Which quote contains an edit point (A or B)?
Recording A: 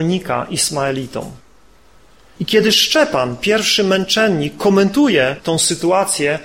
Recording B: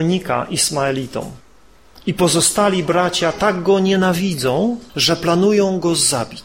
B